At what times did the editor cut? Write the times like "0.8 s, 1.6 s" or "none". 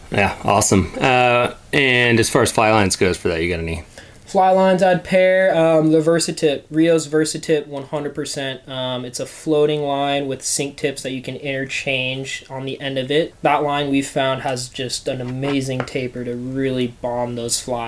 13.3 s